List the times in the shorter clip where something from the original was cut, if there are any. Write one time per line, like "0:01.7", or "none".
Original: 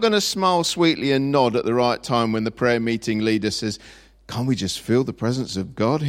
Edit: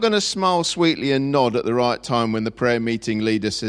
none